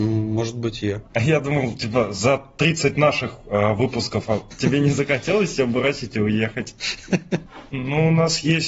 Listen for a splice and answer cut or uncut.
cut